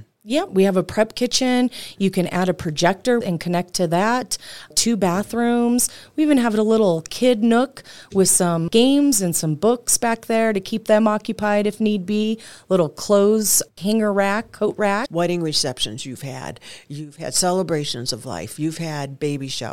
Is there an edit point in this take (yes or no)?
yes